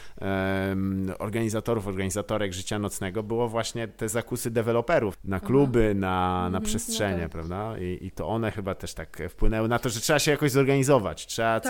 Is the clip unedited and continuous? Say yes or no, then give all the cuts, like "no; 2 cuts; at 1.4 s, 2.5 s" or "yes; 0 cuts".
no; 1 cut; at 5.1 s